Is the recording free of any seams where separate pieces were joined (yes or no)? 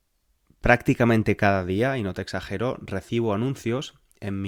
yes